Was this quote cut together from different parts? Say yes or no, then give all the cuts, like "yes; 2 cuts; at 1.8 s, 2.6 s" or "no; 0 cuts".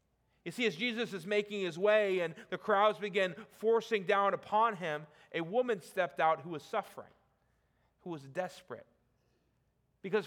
no; 0 cuts